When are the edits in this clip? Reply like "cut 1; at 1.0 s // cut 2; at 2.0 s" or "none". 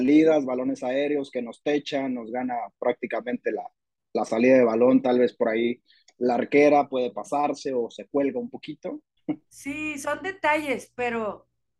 cut 1; at 9.2 s

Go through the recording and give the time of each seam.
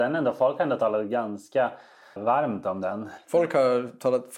cut 1; at 2.2 s

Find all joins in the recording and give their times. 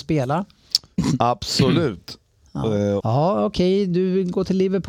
cut 1; at 3.0 s

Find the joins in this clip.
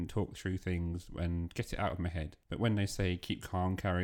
cut 1; at 2.4 s

